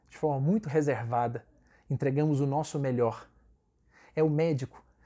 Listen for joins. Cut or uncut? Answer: uncut